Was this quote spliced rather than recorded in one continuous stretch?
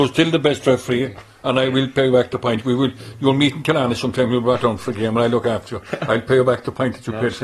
no; 0 cuts

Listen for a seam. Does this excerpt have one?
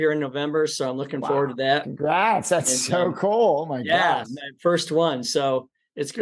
no; 0 cuts

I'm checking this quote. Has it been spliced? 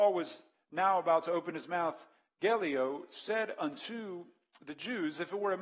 no; 0 cuts

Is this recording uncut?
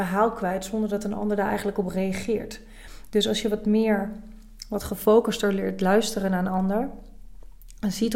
yes; 0 cuts

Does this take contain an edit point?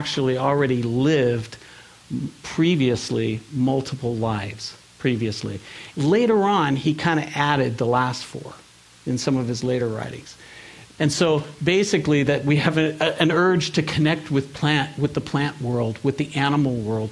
yes; 2 cuts; at 5.9 s, 11.0 s

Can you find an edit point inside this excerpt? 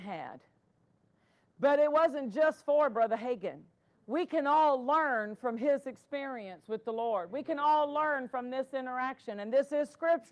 no; 0 cuts

